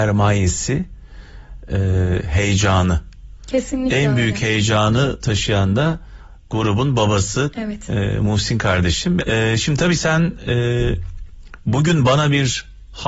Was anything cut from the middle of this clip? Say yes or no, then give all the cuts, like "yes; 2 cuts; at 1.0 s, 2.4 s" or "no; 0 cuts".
yes; 2 cuts; at 7.5 s, 9.2 s